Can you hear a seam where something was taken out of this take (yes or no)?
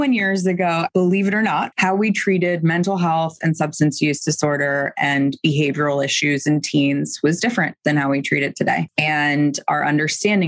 no